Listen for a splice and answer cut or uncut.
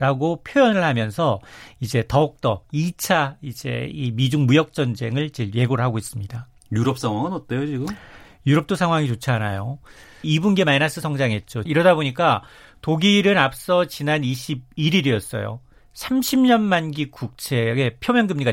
cut